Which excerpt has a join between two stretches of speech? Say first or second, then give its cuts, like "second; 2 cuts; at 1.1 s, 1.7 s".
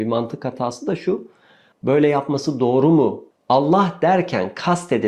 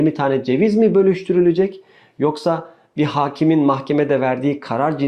first; 2 cuts; at 1.7 s, 3.3 s